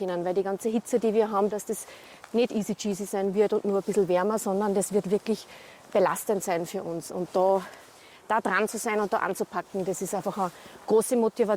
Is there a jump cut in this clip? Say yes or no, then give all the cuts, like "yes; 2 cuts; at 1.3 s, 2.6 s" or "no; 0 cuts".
yes; 1 cut; at 1.5 s